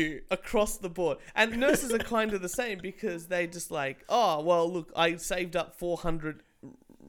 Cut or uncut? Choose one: uncut